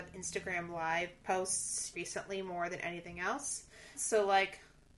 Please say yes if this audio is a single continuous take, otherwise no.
no